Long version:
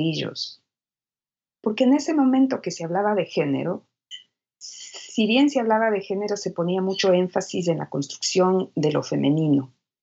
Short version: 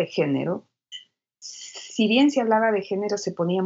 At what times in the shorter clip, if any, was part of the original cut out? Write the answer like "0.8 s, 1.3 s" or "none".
none

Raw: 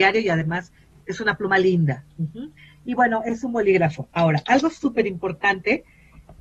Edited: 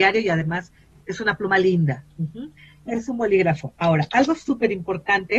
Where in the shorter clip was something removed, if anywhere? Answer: 2.9 s

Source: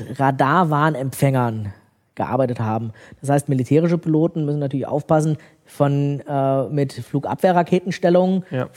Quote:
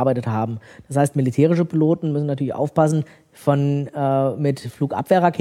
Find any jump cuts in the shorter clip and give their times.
none

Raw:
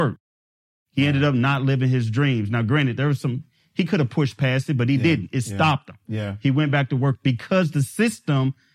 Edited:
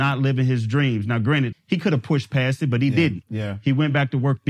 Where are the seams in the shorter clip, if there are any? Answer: 1.5 s, 3.2 s

